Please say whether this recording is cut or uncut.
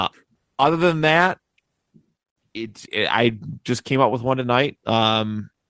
cut